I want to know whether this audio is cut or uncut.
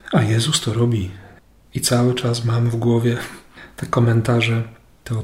uncut